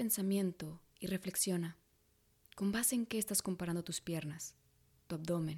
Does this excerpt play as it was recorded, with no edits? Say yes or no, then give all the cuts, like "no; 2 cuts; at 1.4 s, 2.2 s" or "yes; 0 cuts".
yes; 0 cuts